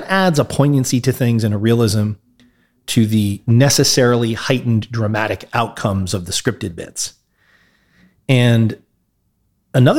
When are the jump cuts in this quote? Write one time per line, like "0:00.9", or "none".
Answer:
none